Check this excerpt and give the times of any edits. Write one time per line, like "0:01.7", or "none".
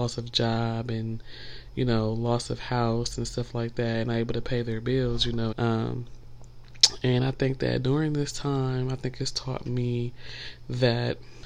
0:05.5